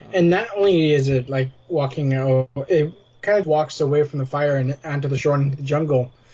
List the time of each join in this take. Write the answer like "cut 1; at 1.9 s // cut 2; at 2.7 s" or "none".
cut 1; at 3.4 s